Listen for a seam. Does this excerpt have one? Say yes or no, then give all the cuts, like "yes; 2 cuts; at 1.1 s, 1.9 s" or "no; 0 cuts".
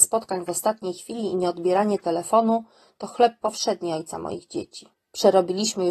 yes; 1 cut; at 4.9 s